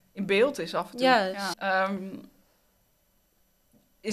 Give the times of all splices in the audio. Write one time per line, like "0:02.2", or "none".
0:01.5